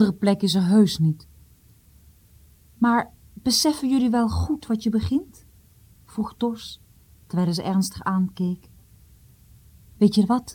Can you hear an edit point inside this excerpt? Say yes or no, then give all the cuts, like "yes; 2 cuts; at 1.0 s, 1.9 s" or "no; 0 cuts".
no; 0 cuts